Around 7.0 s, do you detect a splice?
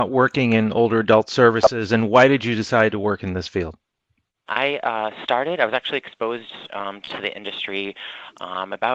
no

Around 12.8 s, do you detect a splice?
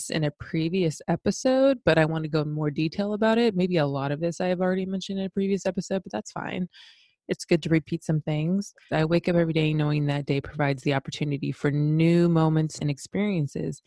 yes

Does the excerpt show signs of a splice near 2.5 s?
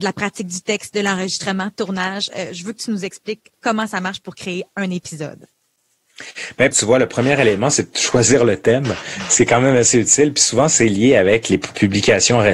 no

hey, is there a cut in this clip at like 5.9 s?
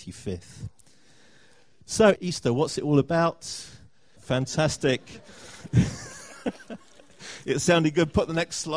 no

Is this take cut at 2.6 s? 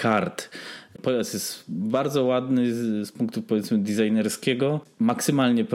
no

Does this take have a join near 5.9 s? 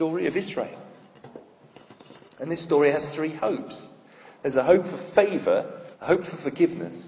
yes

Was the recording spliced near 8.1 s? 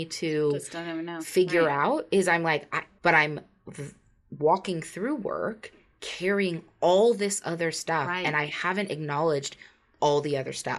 no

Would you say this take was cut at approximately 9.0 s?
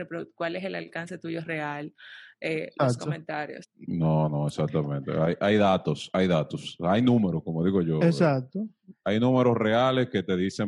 no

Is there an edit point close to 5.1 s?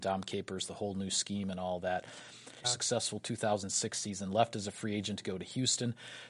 no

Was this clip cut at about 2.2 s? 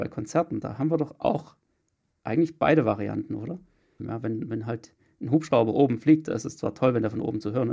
no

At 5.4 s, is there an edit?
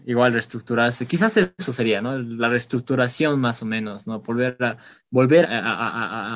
yes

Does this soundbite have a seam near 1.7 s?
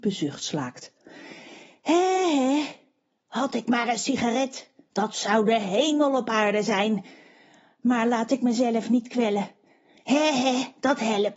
no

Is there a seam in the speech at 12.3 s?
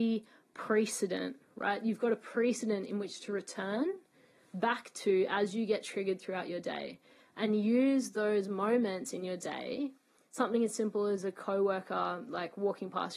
yes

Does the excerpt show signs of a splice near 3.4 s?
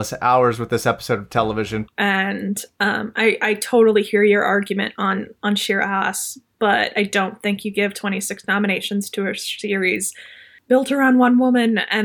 no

